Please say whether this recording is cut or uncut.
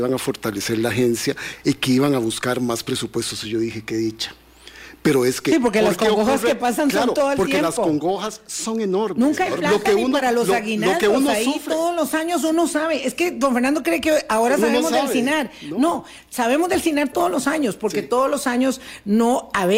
uncut